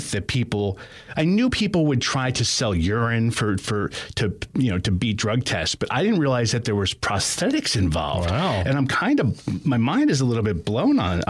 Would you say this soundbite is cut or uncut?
uncut